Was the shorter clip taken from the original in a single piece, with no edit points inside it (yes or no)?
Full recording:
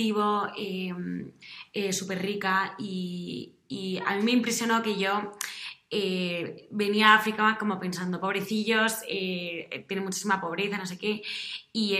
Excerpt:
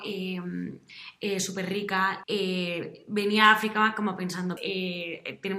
no